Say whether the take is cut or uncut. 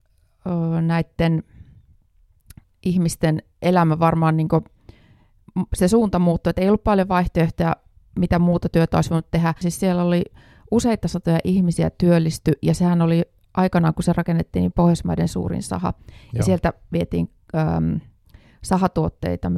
cut